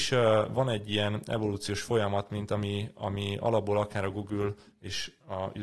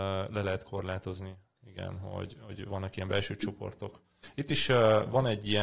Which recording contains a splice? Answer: second; 1 cut; at 4.2 s

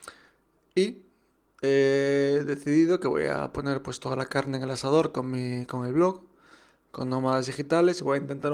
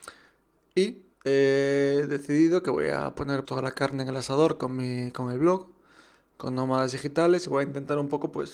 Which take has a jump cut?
second; 2 cuts; at 1.1 s, 3.4 s

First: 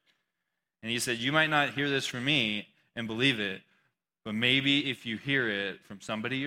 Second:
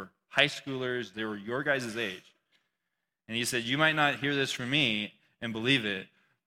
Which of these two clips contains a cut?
second; 1 cut; at 1.1 s

